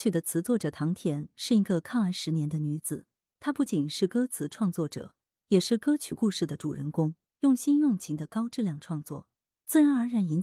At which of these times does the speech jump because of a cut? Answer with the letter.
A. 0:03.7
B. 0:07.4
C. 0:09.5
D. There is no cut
A